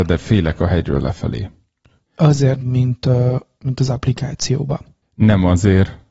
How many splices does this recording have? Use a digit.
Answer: 1